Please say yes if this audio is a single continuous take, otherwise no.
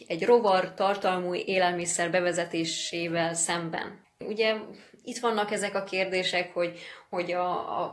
no